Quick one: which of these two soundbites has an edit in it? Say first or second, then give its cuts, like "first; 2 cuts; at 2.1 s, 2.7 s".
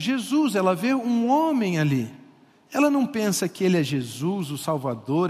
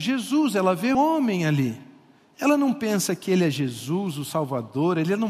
second; 1 cut; at 0.9 s